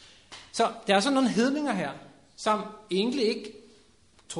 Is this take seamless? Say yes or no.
yes